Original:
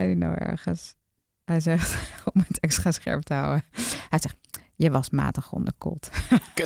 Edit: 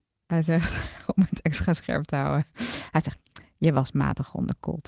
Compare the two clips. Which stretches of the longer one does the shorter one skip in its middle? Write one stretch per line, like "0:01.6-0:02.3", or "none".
none

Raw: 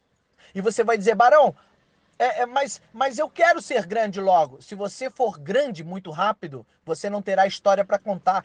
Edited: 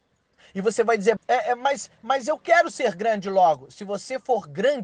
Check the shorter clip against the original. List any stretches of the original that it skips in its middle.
0:01.2-0:02.1

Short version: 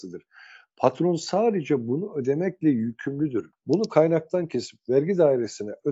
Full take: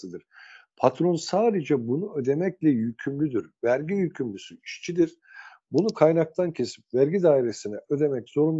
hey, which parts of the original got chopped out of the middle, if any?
0:03.5-0:05.6

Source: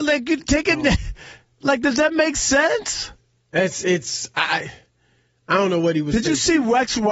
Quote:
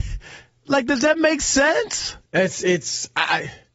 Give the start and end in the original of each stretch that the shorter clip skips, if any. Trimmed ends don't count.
0:03.2-0:03.5

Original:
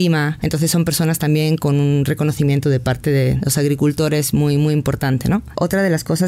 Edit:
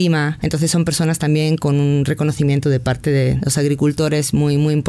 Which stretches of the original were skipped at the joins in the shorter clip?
none

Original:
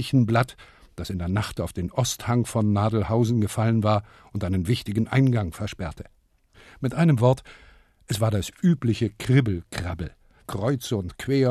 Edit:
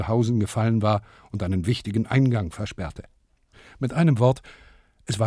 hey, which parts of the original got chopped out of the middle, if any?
none

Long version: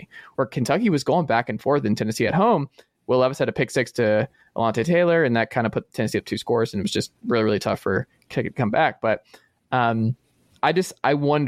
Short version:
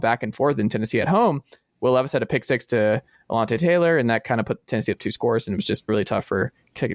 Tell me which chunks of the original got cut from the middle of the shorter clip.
0:07.1-0:07.4

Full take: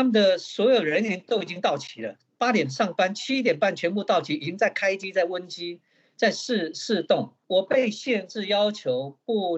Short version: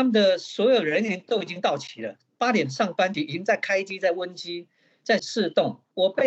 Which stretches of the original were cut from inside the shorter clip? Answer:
0:03.1-0:04.3
0:06.3-0:06.7

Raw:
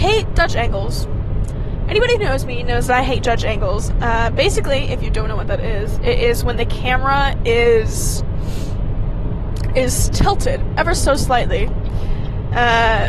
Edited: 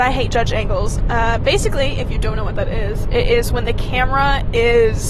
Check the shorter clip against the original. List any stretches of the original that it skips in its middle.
none

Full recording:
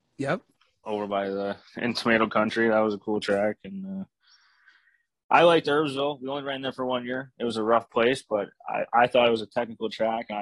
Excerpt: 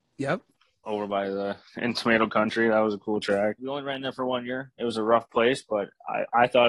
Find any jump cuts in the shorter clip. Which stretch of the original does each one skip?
0:03.6-0:06.2

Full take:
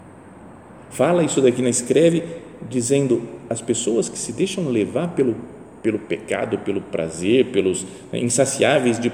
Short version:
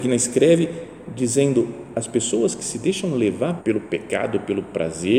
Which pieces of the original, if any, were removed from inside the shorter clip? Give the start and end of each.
0:05.1-0:05.8

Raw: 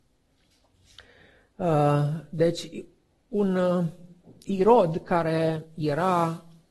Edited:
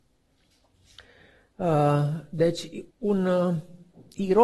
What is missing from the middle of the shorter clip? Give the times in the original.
0:02.9-0:03.2

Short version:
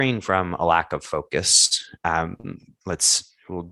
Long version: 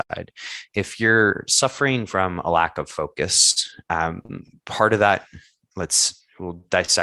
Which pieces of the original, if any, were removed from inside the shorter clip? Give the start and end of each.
0:04.6-0:05.6

